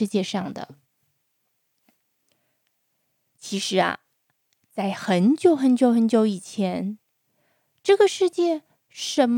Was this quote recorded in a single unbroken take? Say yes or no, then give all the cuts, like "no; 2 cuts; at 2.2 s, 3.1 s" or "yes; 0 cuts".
yes; 0 cuts